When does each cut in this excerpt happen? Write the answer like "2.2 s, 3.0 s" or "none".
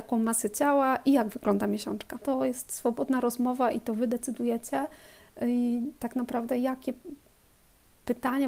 2.2 s